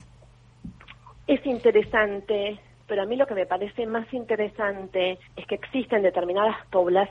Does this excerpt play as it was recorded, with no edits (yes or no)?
no